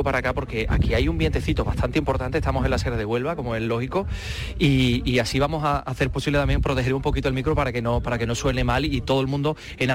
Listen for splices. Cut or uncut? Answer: uncut